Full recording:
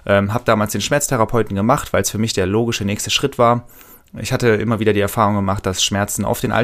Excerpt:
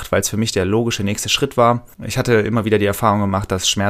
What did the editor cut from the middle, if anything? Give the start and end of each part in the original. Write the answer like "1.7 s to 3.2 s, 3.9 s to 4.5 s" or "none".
3.8 s to 4.1 s